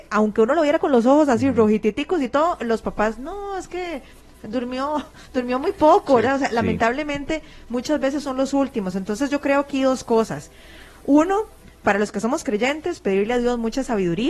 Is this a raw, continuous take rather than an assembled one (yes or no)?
yes